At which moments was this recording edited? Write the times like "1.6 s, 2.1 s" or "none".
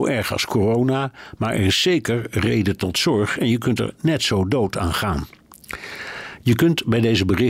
none